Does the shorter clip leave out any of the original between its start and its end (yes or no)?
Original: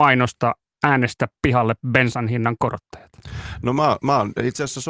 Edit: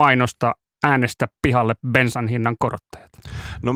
no